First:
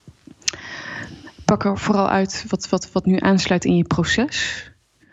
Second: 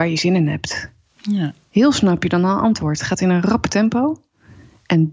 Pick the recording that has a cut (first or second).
second